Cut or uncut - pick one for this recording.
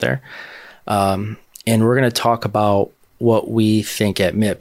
uncut